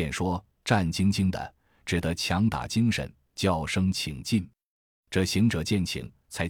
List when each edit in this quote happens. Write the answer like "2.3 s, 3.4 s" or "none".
none